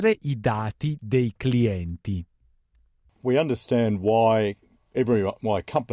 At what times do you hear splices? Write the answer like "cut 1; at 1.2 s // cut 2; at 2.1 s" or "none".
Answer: none